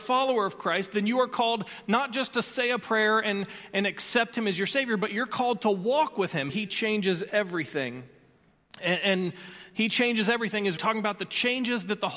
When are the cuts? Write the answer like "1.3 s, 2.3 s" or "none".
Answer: 6.5 s, 10.8 s